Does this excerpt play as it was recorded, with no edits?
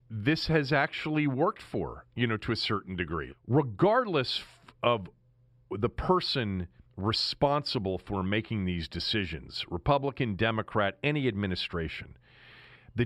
no; 1 cut; at 3.3 s

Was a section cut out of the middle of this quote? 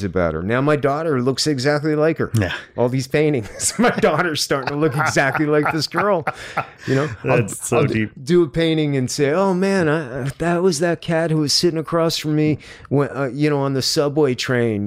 no; 0 cuts

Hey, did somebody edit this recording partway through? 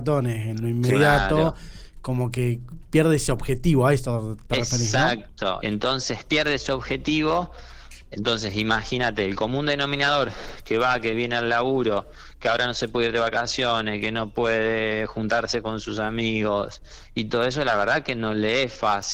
yes; 1 cut; at 5.6 s

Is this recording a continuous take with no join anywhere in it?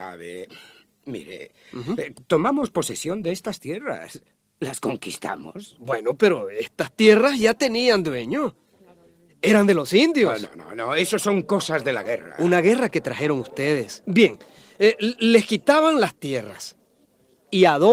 no; 1 cut; at 2.1 s

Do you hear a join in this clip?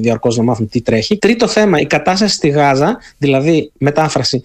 yes; 1 cut; at 1.2 s

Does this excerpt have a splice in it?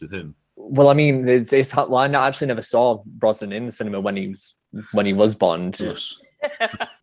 yes; 1 cut; at 5.8 s

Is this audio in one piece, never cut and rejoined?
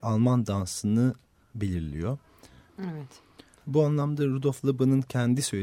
no; 1 cut; at 2.7 s

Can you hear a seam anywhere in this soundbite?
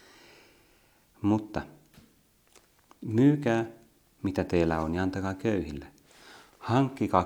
no; 0 cuts

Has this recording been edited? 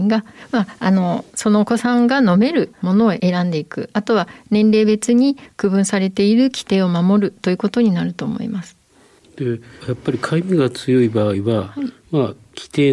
no; 0 cuts

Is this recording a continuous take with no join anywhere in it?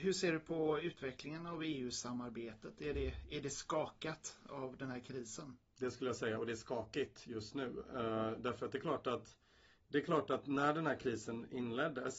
yes; 0 cuts

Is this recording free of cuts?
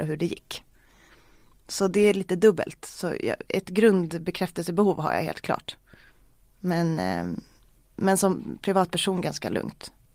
yes; 0 cuts

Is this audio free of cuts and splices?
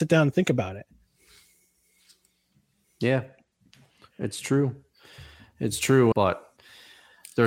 no; 1 cut; at 6.1 s

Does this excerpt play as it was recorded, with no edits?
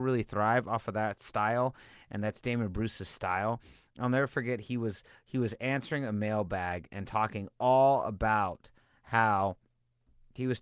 yes; 0 cuts

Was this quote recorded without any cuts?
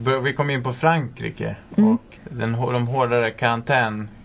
no; 1 cut; at 2.2 s

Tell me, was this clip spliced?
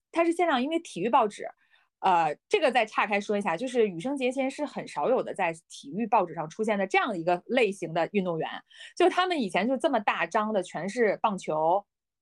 no; 0 cuts

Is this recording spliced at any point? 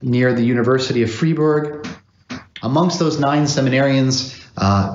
yes; 1 cut; at 2.6 s

